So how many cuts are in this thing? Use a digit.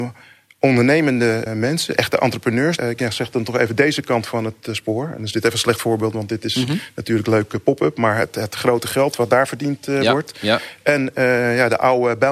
2